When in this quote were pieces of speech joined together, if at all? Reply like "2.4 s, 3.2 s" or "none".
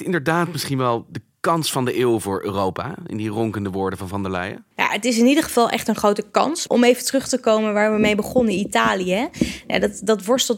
4.7 s, 6.7 s